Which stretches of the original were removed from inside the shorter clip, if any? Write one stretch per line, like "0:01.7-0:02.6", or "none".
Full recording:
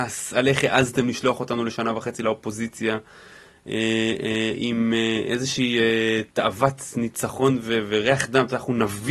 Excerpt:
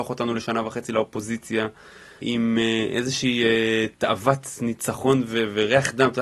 0:03.5-0:04.6